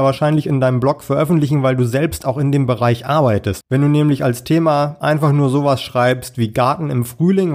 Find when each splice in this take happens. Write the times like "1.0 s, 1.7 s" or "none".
3.6 s